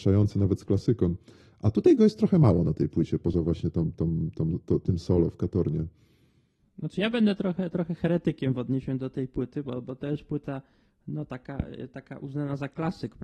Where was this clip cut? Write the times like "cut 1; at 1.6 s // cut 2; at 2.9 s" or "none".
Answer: none